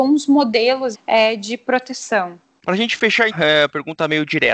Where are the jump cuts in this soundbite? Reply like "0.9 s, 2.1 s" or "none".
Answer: 0.9 s, 3.3 s